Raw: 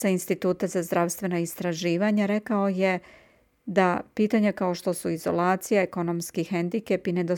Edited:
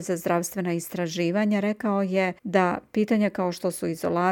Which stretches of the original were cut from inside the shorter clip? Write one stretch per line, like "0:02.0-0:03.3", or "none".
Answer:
0:03.0-0:03.6